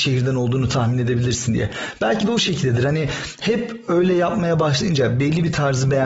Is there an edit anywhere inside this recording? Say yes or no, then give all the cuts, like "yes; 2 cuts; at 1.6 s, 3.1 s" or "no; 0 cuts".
no; 0 cuts